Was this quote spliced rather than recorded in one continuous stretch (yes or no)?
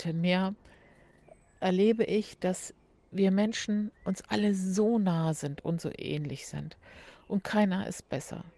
no